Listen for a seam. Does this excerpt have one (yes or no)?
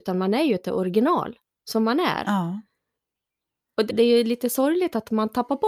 yes